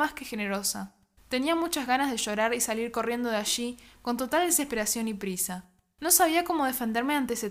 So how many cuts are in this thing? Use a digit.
1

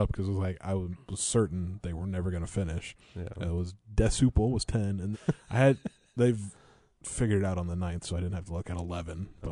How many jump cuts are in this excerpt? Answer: 1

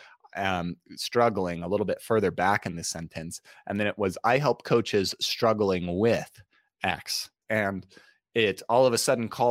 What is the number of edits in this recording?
1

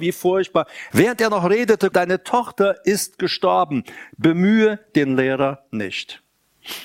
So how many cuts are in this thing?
2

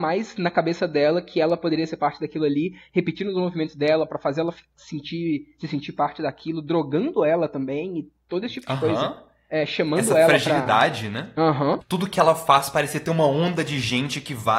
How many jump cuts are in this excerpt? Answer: 1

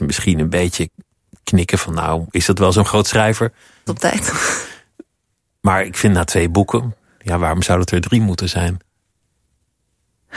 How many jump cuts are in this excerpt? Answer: 1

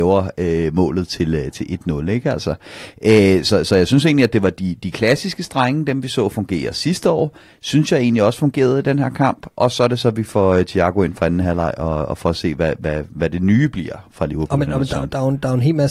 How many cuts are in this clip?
0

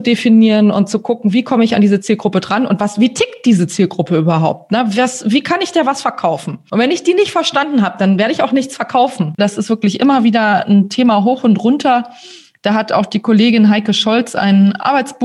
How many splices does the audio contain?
1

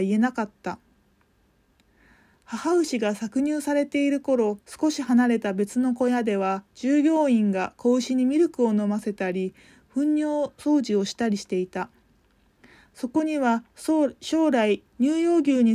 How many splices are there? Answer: 1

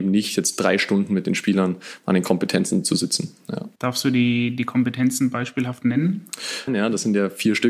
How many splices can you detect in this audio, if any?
2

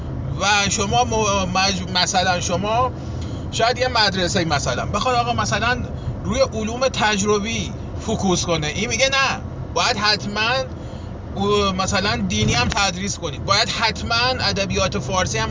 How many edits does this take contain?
1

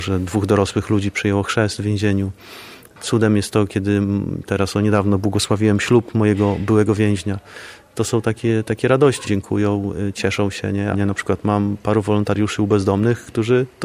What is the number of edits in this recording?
2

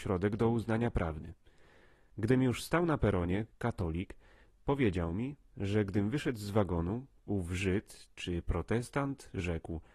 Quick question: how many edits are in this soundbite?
1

